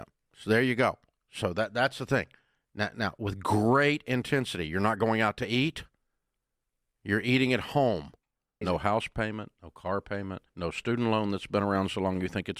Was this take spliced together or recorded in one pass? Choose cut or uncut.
cut